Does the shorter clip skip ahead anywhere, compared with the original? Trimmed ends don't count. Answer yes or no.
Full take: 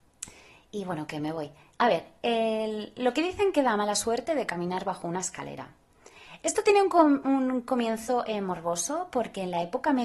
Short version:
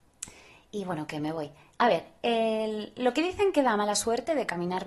no